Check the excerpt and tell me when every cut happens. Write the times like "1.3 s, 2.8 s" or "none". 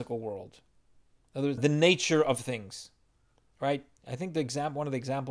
1.6 s